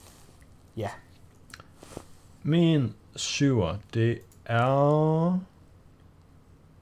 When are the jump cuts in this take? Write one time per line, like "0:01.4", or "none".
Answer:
none